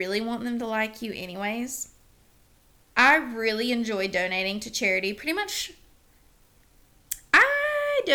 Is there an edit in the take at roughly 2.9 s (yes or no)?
yes